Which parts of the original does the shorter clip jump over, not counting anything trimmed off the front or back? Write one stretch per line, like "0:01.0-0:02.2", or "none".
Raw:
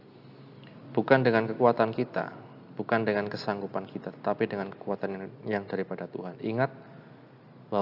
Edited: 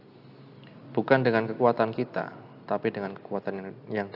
0:02.7-0:04.2